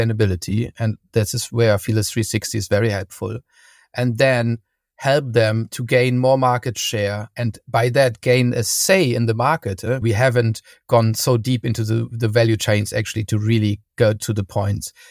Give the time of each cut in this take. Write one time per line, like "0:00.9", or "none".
0:10.0